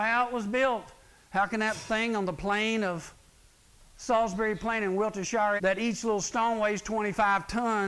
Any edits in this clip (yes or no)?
yes